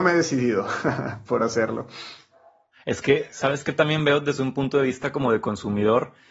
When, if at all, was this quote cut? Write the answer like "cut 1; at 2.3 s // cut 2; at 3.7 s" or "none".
none